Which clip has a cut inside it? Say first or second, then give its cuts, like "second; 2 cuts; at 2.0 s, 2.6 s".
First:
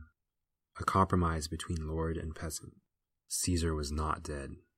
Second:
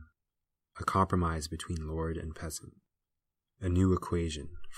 first; 1 cut; at 3.2 s